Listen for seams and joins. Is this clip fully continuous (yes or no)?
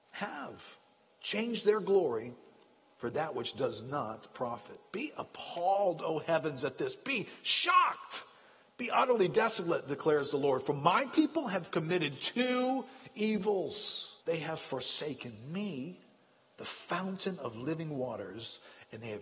no